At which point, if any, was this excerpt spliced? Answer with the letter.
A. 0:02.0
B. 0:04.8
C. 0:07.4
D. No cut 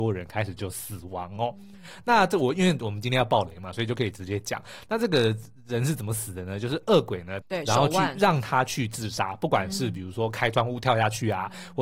C